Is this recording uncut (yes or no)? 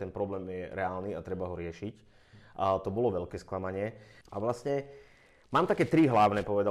no